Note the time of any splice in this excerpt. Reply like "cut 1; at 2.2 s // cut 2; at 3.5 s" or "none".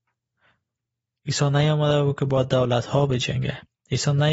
cut 1; at 1.1 s